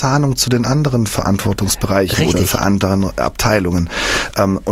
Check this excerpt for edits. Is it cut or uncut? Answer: uncut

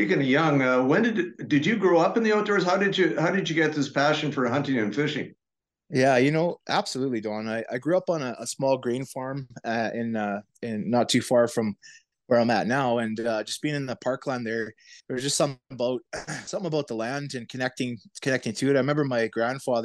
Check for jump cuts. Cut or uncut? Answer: uncut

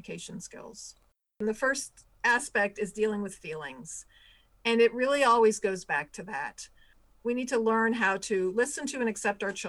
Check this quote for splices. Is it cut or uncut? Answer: uncut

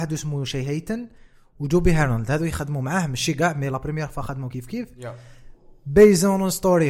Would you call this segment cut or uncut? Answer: uncut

